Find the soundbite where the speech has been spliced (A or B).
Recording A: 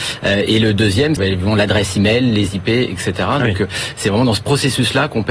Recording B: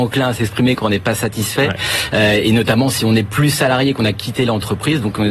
A